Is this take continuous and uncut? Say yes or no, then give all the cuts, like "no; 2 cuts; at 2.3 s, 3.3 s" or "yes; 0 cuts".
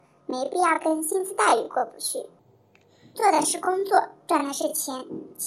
no; 1 cut; at 3.1 s